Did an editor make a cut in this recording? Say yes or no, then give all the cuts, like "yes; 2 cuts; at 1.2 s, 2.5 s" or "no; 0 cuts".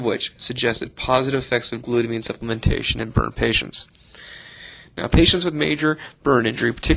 no; 0 cuts